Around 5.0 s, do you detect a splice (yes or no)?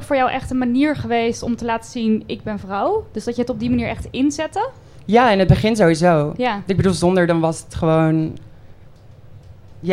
no